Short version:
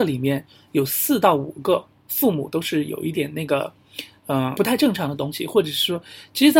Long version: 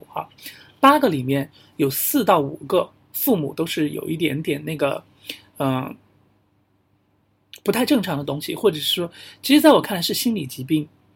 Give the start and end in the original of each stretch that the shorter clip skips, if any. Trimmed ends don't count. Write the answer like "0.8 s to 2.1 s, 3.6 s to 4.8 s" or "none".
4.2 s to 4.4 s, 5.8 s to 7.6 s